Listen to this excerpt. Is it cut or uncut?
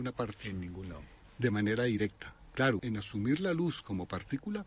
cut